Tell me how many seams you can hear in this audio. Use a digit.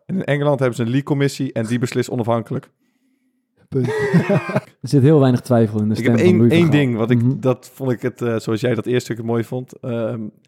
1